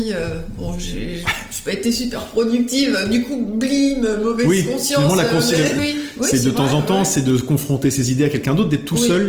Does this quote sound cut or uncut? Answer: cut